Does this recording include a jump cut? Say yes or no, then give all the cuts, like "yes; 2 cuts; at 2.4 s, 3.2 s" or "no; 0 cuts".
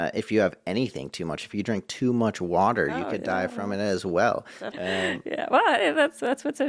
yes; 1 cut; at 4.7 s